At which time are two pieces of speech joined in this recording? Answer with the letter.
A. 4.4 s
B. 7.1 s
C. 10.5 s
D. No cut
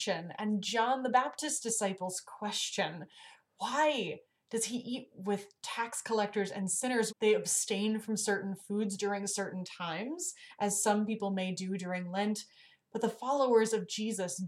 B